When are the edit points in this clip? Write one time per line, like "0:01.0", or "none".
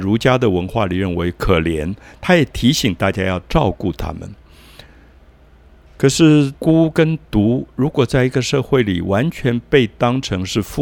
0:06.6